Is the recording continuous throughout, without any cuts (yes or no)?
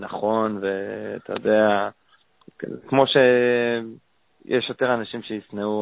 yes